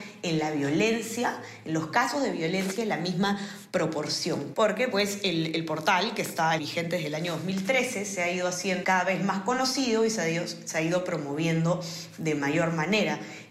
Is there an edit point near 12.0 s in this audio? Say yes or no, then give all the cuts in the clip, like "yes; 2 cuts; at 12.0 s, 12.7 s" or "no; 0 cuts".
no; 3 cuts; at 4.5 s, 6.6 s, 8.8 s